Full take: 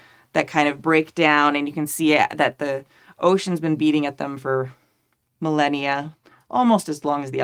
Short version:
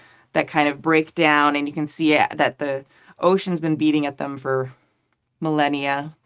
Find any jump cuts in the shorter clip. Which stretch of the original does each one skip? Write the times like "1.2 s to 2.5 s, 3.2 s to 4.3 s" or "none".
none

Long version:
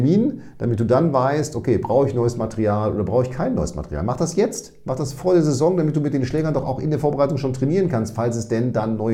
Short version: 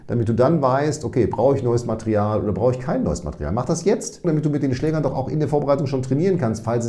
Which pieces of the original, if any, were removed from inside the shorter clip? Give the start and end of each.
4.8 s to 5.8 s

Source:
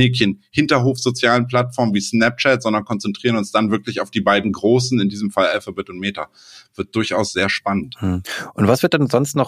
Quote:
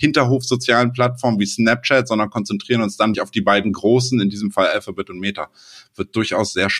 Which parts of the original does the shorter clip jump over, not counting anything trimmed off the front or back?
3.7 s to 3.9 s

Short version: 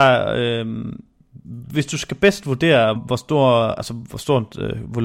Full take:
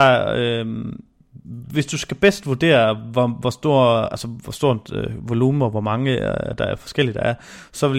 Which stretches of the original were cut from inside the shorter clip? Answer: 3.0 s to 3.3 s

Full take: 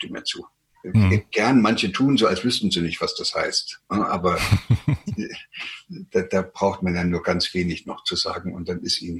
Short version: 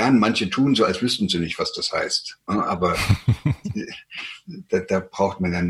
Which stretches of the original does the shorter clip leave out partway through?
none

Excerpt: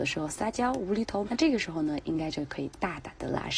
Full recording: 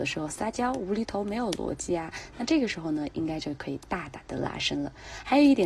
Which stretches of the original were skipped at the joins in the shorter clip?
1.2 s to 2.3 s

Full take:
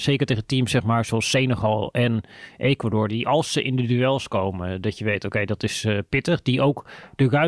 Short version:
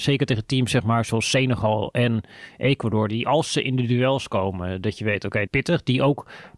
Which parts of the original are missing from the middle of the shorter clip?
5.5 s to 6.1 s

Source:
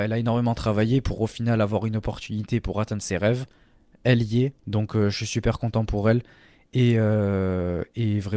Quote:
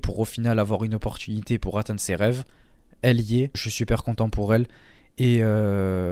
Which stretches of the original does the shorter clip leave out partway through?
4.6 s to 5.1 s

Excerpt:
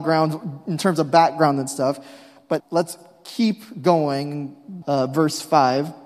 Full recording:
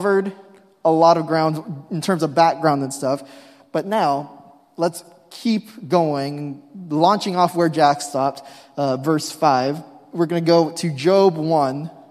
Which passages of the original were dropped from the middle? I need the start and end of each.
3.8 s to 4.7 s, 6.9 s to 8.7 s

